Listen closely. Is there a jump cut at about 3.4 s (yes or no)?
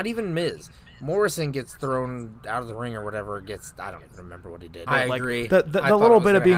no